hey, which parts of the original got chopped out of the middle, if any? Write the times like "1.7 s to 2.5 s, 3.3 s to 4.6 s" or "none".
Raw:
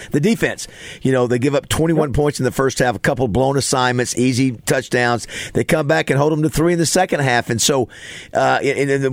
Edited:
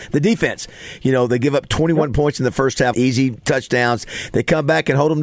2.9 s to 4.1 s